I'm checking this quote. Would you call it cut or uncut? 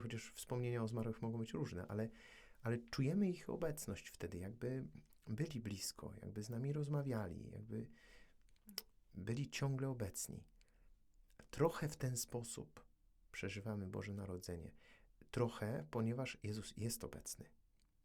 uncut